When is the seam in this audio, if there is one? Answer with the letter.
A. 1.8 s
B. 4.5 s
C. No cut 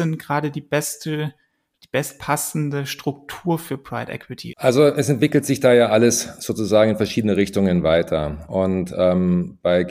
B